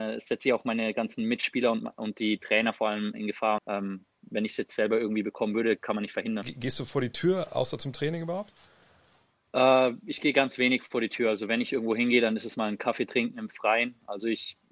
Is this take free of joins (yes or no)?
no